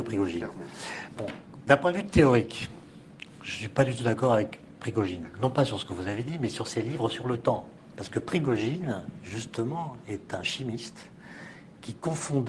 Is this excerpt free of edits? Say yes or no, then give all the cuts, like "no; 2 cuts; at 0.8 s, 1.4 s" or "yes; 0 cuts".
no; 1 cut; at 7.9 s